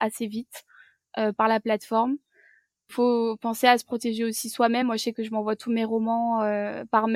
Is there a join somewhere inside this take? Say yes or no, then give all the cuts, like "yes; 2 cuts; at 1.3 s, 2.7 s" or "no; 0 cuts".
no; 0 cuts